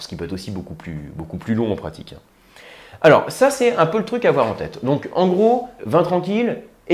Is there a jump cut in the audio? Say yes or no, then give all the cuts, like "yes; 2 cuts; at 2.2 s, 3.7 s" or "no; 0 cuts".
yes; 1 cut; at 5.8 s